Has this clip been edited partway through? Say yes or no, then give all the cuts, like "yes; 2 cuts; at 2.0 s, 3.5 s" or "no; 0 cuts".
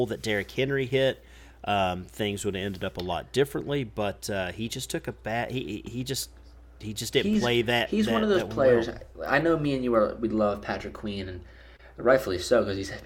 no; 0 cuts